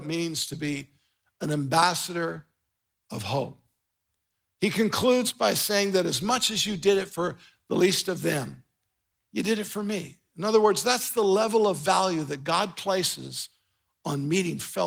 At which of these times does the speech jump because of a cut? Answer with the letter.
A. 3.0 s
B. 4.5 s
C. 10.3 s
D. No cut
D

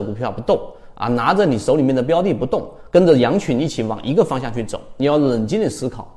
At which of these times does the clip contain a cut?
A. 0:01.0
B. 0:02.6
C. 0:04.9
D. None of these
D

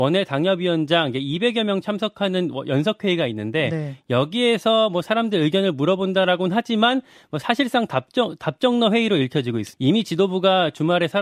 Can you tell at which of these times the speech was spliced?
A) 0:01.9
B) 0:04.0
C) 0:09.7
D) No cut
C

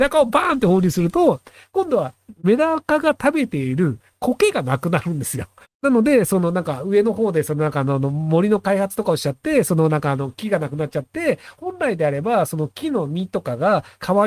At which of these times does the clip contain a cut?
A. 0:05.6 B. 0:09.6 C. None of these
A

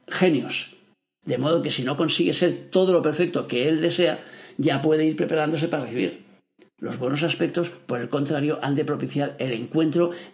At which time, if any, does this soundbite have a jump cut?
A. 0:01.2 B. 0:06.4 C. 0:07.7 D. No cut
A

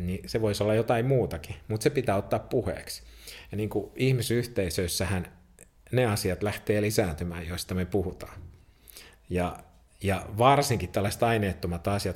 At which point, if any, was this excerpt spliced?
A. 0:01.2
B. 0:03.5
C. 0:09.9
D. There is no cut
D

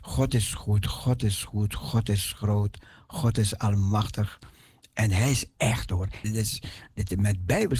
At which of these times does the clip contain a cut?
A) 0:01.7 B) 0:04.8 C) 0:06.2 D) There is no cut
C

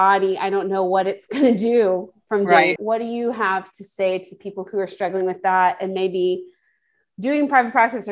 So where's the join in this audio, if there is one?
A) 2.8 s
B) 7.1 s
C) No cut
A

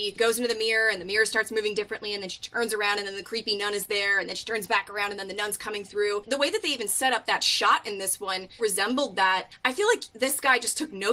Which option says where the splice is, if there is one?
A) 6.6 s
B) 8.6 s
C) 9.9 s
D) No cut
B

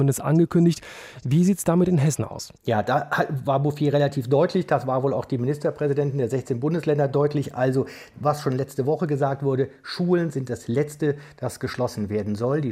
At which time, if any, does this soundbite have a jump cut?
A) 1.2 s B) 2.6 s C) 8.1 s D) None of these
B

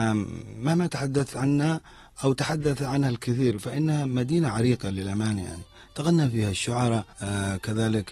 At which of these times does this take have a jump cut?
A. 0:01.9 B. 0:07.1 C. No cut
B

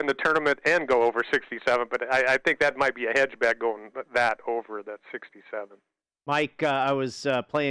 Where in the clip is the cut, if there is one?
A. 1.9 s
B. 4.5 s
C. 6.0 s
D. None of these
D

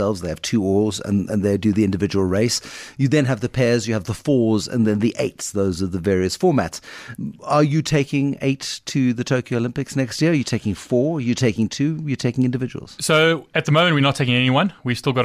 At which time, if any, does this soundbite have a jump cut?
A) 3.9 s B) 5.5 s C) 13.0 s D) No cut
D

